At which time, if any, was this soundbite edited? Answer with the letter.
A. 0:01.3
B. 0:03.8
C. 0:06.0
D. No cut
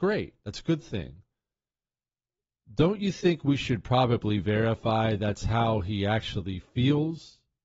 D